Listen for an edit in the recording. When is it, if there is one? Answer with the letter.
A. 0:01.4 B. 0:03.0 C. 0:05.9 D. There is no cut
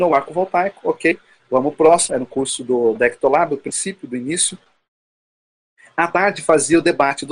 B